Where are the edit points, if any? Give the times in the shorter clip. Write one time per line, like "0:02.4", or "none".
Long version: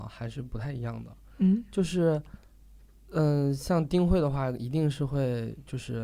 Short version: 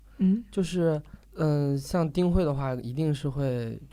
0:01.2